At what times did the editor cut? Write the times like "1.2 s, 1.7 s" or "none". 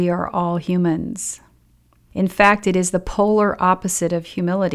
none